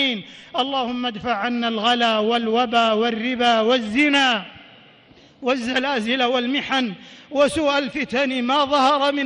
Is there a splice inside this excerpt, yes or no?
no